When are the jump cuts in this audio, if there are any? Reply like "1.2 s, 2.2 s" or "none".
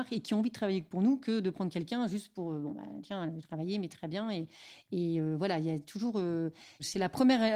none